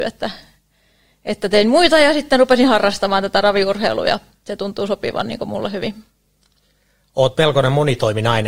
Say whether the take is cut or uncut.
uncut